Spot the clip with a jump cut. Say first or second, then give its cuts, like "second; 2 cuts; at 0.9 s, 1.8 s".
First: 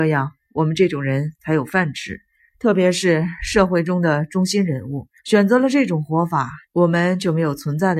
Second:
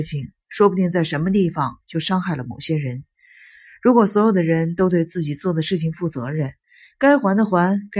first; 3 cuts; at 2.4 s, 5.2 s, 6.6 s